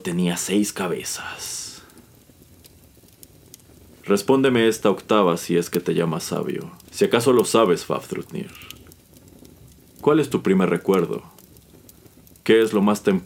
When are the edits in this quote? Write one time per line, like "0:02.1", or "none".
0:06.8